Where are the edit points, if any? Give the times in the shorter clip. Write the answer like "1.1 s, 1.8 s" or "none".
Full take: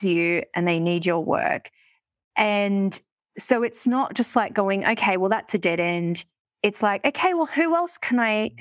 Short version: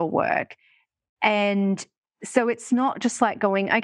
none